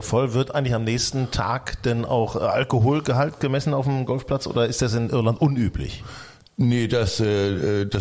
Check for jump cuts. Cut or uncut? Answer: uncut